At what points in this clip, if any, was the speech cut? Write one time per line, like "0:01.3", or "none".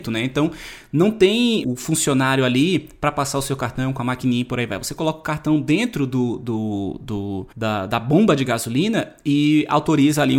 0:01.6
0:07.5